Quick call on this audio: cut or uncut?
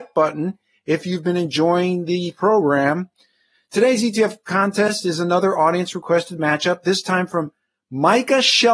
uncut